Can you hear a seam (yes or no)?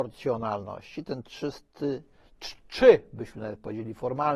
no